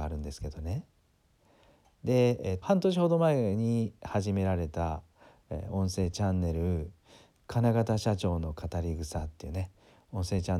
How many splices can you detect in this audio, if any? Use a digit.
1